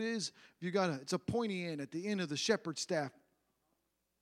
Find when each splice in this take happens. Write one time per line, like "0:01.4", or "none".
none